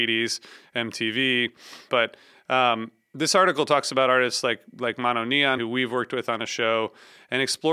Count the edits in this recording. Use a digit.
2